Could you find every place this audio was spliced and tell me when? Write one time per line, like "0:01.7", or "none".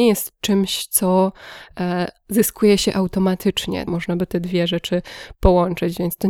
0:03.9

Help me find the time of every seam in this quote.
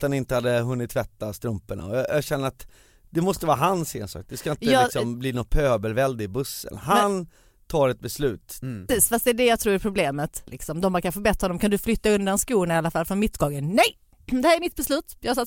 0:08.9
0:10.5

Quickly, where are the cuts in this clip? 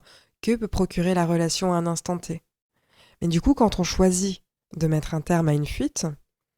none

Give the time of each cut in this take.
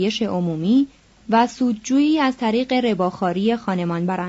none

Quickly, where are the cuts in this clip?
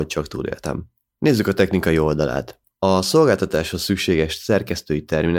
0:02.6

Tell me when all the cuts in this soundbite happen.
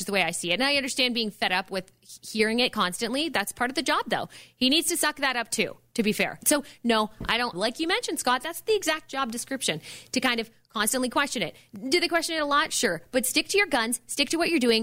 0:06.4
0:07.5

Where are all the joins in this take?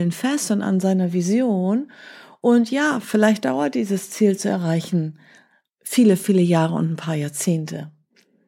none

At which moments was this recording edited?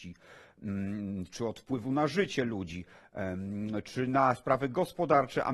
none

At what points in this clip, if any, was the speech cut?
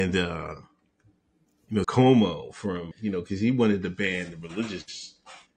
0:01.8
0:02.9

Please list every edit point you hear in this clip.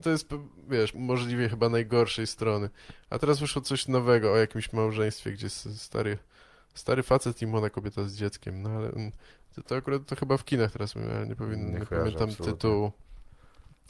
0:00.9

